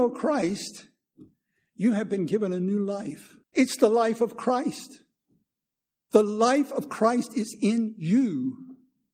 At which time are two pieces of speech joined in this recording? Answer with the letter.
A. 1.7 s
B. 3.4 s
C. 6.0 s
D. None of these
B